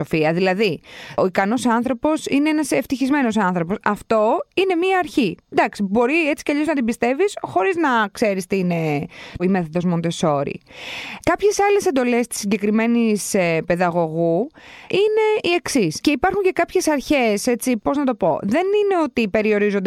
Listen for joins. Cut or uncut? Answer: cut